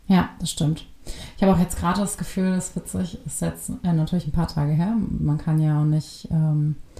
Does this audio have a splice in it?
no; 0 cuts

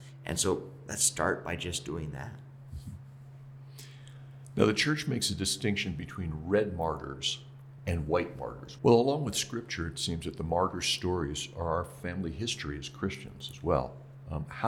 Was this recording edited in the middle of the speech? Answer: yes; 2 cuts; at 7.8 s, 8.8 s

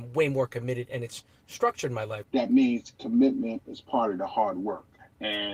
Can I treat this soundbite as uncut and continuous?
no; 1 cut; at 2.2 s

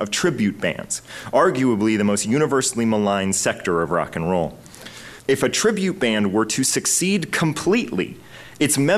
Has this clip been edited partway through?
yes; 1 cut; at 5.2 s

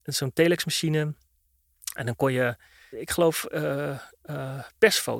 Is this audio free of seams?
no; 1 cut; at 2.9 s

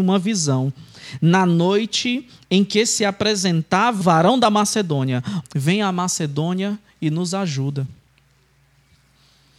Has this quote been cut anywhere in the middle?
yes; 2 cuts; at 4.0 s, 5.4 s

